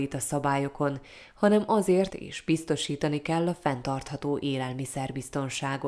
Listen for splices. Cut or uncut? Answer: cut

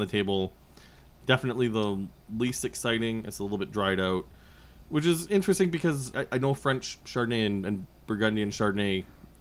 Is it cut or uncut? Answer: cut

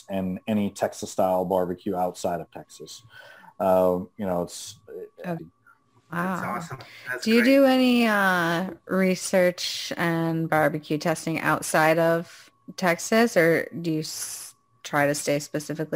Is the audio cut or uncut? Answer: cut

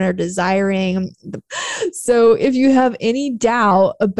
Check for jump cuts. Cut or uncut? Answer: cut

